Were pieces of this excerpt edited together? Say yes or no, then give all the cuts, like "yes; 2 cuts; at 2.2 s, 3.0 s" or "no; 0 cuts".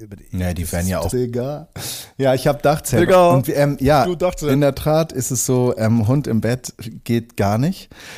yes; 1 cut; at 1.1 s